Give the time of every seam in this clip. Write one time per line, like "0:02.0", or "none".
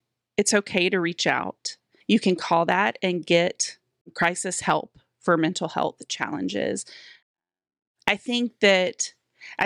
0:02.0